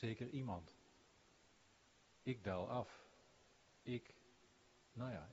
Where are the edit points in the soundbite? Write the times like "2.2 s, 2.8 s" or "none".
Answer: none